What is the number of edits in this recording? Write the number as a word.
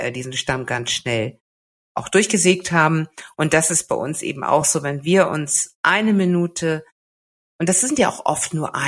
zero